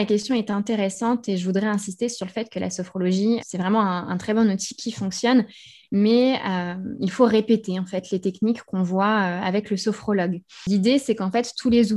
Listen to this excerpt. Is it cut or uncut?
cut